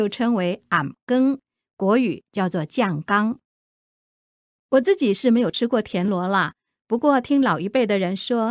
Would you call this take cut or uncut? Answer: uncut